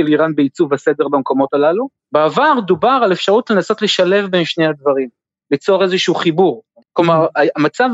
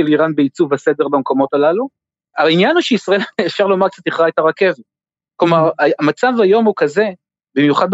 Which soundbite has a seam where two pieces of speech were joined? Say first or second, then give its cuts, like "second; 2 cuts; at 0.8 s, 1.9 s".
first; 2 cuts; at 2.0 s, 6.8 s